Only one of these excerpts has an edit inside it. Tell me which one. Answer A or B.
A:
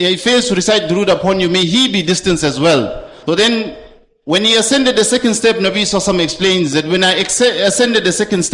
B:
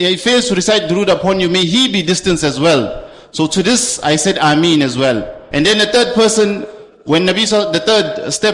A